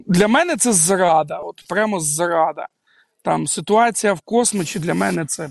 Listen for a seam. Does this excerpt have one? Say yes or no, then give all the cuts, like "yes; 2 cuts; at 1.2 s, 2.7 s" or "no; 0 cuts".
no; 0 cuts